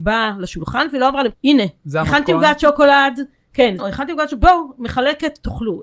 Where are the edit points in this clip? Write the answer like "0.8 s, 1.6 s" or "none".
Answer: 1.3 s, 3.8 s